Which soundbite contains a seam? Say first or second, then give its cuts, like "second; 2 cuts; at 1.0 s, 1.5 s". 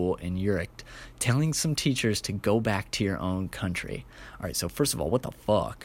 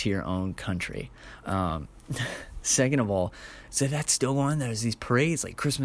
second; 1 cut; at 1.4 s